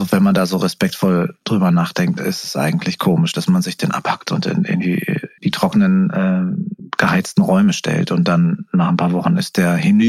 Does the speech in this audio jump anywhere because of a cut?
no; 0 cuts

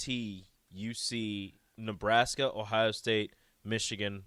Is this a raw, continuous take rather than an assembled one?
yes; 0 cuts

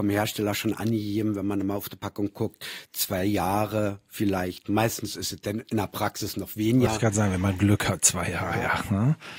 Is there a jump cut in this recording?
no; 0 cuts

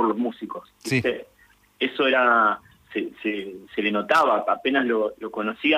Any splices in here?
no; 0 cuts

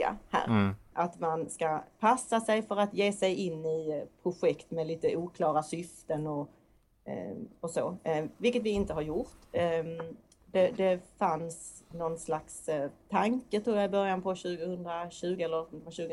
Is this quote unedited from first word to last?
no; 1 cut; at 0.9 s

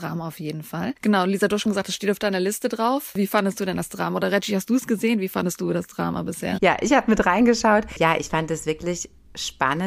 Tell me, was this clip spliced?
yes; 1 cut; at 6.6 s

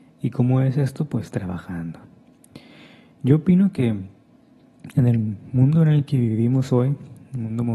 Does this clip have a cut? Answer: no; 0 cuts

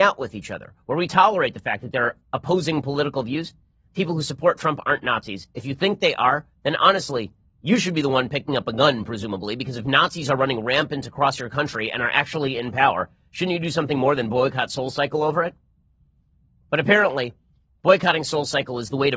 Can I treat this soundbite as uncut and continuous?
no; 1 cut; at 3.9 s

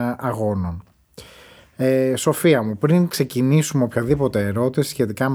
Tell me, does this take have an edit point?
no; 0 cuts

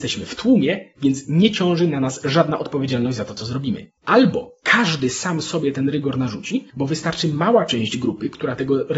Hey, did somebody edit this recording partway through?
yes; 2 cuts; at 4.0 s, 6.7 s

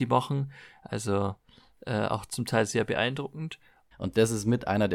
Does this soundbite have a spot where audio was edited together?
yes; 1 cut; at 3.9 s

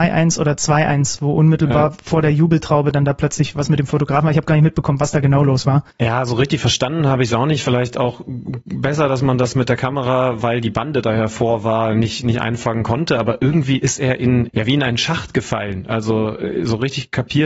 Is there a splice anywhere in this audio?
yes; 2 cuts; at 5.9 s, 14.5 s

